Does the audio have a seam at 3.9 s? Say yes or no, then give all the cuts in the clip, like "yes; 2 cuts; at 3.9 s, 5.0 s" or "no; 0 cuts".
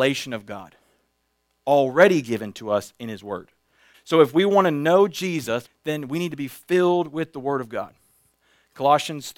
yes; 2 cuts; at 3.9 s, 5.7 s